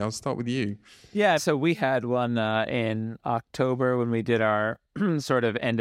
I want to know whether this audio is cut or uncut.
cut